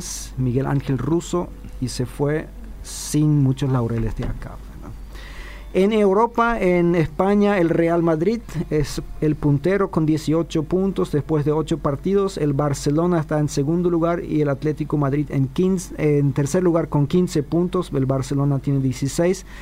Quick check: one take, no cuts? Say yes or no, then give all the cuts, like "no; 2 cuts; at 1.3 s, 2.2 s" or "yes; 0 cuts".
yes; 0 cuts